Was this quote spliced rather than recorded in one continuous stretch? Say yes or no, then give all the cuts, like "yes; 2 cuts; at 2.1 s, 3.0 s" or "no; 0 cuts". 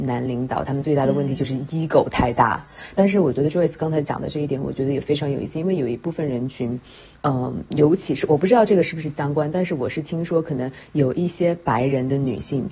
yes; 1 cut; at 3.0 s